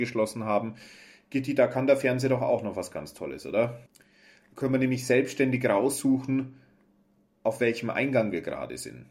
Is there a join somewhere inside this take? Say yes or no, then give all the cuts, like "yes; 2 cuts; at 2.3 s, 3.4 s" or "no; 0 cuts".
yes; 1 cut; at 3.9 s